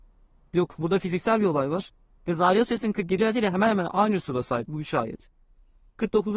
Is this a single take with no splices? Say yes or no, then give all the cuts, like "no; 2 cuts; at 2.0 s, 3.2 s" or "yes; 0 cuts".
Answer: no; 2 cuts; at 3.2 s, 4.7 s